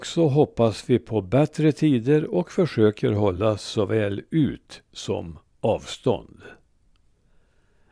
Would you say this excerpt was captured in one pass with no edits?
yes; 0 cuts

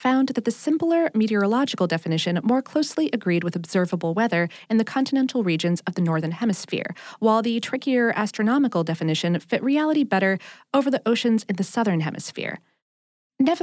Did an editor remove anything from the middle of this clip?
no; 0 cuts

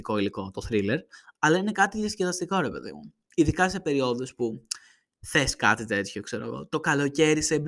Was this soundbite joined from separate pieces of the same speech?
no; 0 cuts

